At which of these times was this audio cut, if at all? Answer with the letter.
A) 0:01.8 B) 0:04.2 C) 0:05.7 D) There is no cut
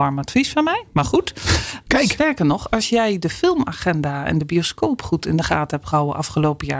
A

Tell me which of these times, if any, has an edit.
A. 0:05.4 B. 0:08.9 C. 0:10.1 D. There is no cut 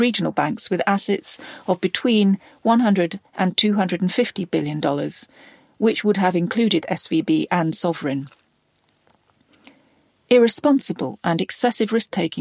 D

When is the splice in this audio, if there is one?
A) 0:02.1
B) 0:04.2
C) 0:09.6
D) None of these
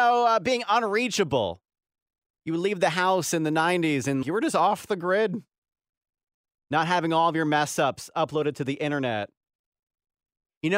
B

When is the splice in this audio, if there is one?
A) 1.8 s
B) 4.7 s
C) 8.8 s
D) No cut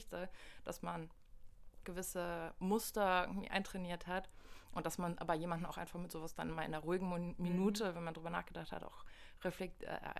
A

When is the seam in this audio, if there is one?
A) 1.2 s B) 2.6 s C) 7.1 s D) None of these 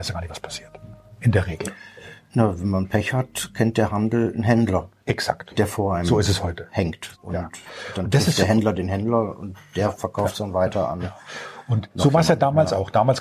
C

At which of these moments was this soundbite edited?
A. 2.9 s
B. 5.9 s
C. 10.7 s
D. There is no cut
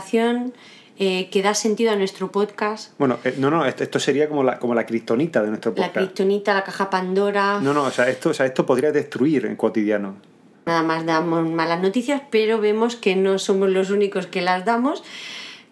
C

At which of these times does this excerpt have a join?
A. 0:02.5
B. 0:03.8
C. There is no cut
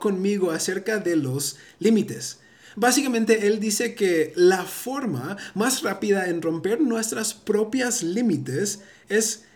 C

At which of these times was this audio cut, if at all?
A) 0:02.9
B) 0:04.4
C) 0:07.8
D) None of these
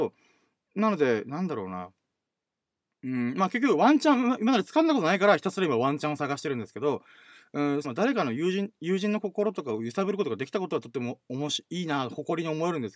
C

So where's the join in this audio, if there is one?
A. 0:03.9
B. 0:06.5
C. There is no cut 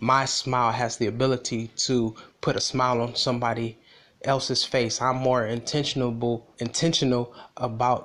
B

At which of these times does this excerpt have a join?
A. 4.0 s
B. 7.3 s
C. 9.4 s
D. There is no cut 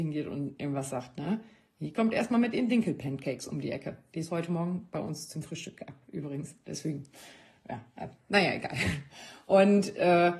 D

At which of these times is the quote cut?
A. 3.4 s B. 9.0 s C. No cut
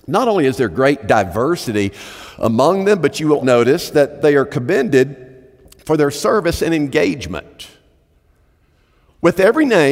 A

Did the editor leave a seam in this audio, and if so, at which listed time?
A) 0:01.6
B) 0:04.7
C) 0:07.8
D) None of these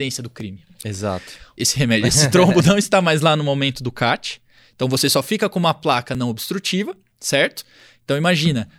A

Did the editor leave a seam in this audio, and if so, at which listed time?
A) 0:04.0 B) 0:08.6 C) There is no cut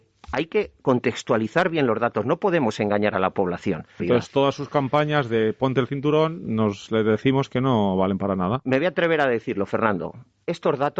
A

